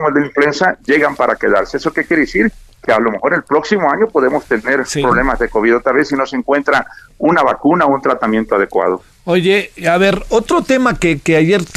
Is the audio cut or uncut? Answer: uncut